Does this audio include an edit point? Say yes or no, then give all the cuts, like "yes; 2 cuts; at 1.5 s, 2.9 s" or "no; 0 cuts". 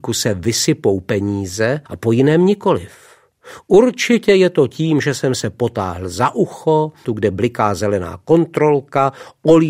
yes; 2 cuts; at 1.9 s, 7.0 s